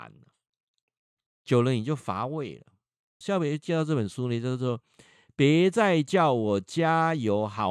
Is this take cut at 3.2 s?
yes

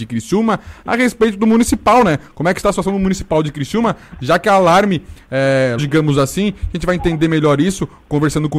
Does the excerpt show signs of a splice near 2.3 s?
no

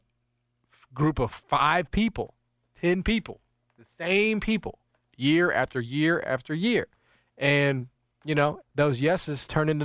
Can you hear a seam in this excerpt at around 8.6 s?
yes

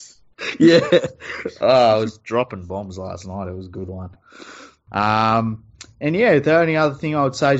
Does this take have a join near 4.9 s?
yes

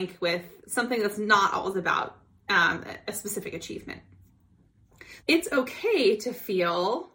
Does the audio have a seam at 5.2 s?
yes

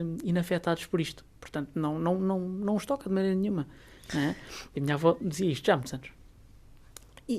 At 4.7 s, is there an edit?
yes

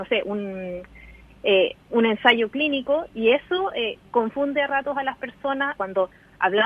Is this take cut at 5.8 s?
yes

